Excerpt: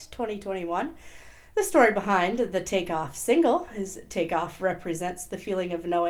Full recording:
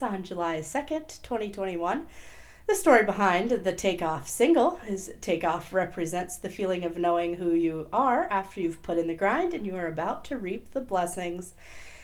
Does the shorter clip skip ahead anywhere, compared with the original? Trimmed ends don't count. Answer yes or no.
no